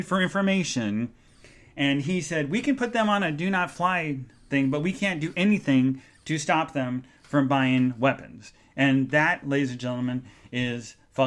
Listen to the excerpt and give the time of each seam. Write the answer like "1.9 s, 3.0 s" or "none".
none